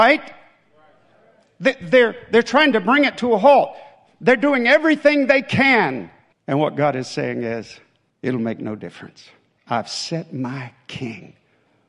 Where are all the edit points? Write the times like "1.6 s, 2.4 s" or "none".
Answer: 6.3 s, 8.1 s, 9.6 s